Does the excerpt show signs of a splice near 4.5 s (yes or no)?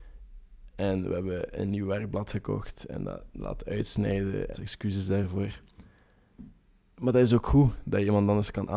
yes